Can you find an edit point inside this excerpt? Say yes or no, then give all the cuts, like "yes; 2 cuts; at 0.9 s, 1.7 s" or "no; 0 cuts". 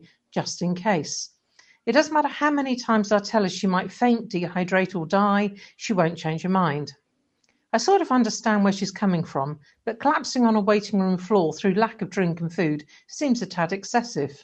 no; 0 cuts